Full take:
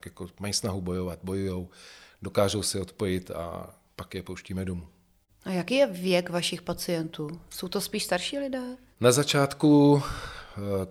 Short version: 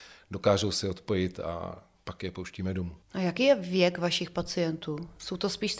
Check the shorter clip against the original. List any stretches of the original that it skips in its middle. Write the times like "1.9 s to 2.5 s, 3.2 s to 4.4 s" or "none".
4.9 s to 5.3 s